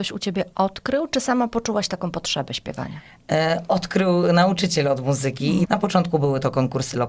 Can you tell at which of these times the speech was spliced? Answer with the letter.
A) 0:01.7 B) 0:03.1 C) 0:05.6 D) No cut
C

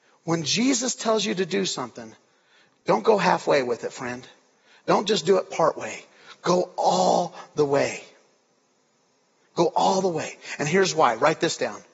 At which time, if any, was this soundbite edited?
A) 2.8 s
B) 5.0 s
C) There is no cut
C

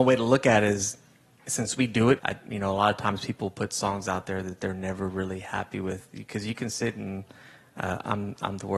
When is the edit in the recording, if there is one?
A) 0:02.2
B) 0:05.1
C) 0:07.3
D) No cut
A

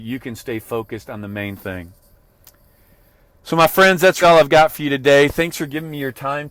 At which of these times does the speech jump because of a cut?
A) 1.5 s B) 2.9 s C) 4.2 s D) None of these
C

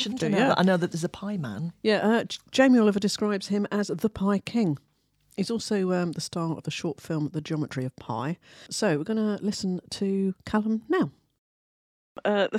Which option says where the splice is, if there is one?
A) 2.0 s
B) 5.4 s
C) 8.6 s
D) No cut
D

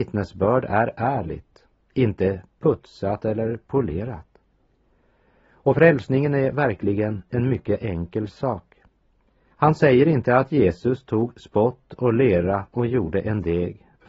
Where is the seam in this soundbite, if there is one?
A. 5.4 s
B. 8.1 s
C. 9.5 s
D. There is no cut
C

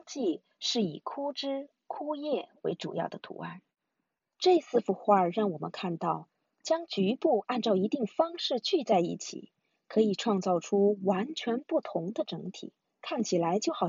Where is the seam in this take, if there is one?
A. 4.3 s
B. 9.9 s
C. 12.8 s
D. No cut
C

